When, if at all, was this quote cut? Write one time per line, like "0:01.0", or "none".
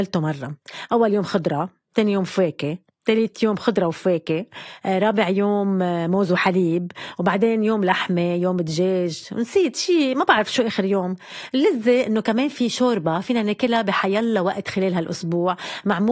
none